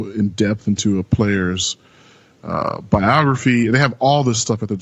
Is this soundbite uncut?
yes; 0 cuts

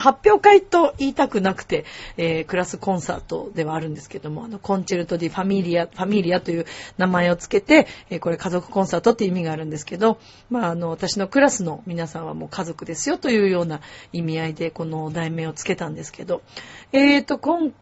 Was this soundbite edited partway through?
no; 0 cuts

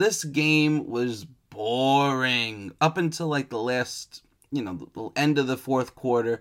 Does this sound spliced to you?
no; 0 cuts

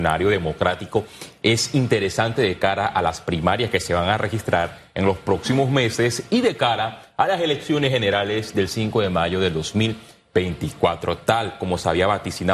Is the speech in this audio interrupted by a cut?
no; 0 cuts

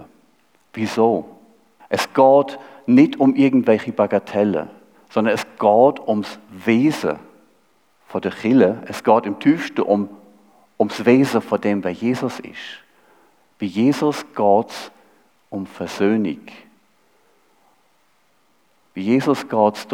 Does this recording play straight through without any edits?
no; 1 cut; at 1.8 s

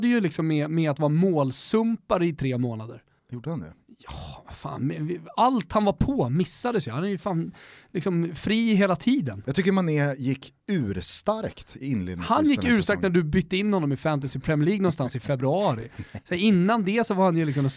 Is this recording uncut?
no; 1 cut; at 3.2 s

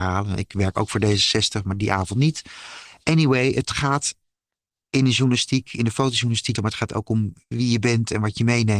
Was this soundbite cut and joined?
yes; 1 cut; at 6.6 s

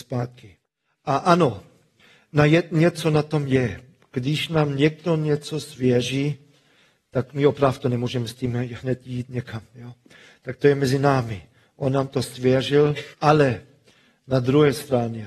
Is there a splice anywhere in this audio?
yes; 1 cut; at 13.1 s

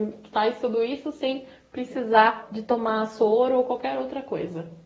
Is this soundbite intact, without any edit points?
yes; 0 cuts

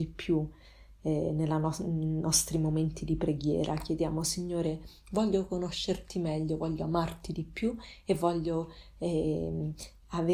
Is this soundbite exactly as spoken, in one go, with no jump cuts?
yes; 0 cuts

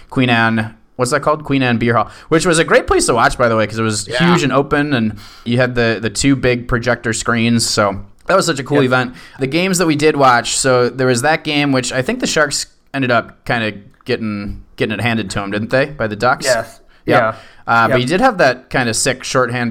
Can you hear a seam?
no; 0 cuts

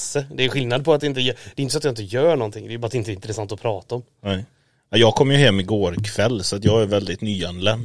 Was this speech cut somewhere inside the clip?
no; 0 cuts

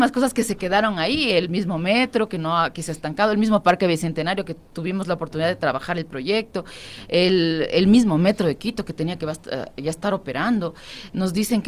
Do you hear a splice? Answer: no; 0 cuts

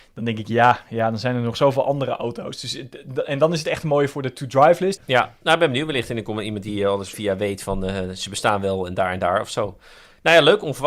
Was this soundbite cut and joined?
yes; 2 cuts; at 5.0 s, 7.1 s

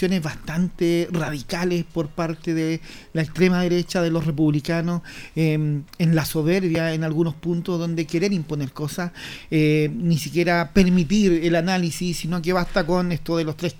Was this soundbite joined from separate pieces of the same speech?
no; 0 cuts

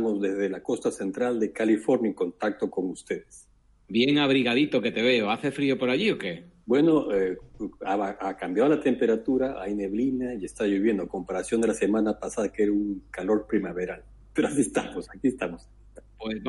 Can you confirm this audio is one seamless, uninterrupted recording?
yes; 0 cuts

